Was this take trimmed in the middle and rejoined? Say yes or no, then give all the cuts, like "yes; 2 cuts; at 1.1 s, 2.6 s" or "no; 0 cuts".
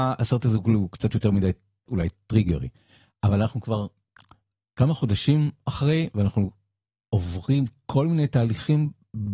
no; 0 cuts